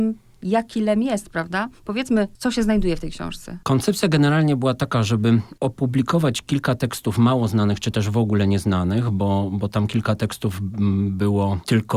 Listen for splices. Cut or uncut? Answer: uncut